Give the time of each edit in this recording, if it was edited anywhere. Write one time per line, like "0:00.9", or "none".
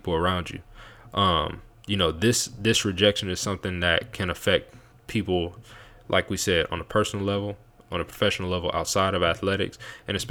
none